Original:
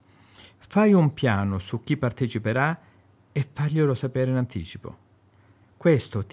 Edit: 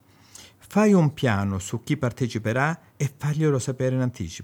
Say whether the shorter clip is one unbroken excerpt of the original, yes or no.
no